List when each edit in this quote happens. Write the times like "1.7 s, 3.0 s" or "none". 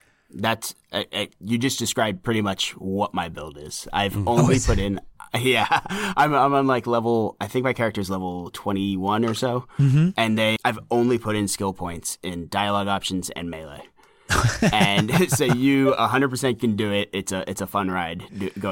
10.6 s